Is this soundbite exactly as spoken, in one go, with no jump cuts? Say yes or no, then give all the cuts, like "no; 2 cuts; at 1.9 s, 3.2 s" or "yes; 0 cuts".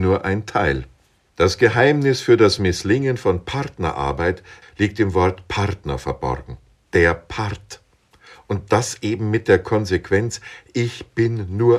no; 3 cuts; at 1.3 s, 4.6 s, 6.8 s